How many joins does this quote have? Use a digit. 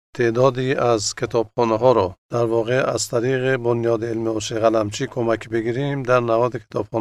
1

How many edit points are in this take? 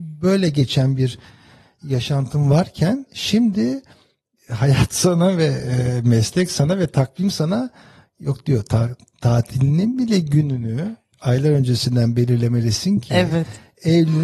0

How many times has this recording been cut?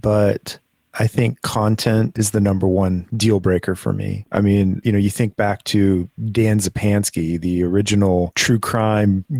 0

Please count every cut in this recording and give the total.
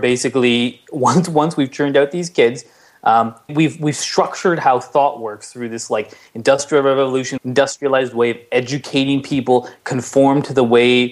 2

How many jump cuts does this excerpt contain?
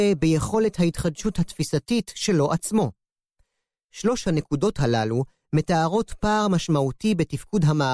0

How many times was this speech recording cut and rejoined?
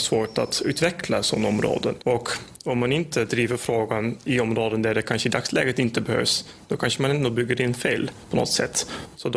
1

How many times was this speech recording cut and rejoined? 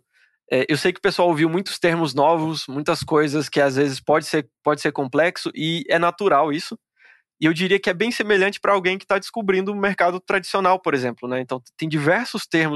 0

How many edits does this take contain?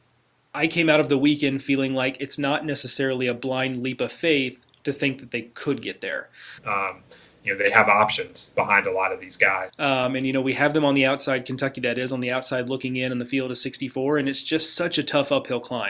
2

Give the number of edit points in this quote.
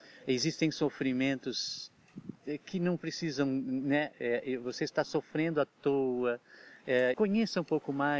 1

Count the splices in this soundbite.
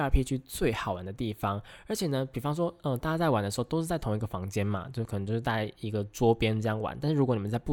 0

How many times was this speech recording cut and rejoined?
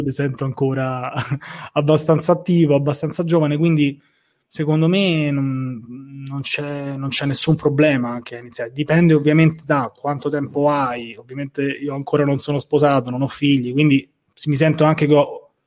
0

